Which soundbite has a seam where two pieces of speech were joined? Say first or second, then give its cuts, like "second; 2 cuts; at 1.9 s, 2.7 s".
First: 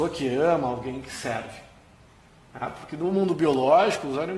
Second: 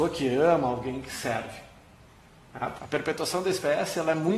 second; 1 cut; at 2.8 s